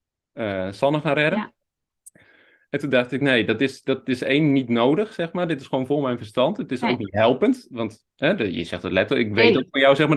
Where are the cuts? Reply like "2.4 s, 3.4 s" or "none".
none